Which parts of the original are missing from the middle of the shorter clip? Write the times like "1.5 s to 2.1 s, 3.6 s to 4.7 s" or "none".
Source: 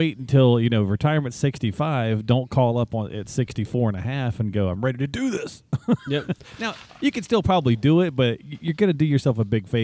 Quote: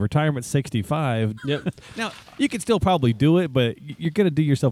2.3 s to 6.0 s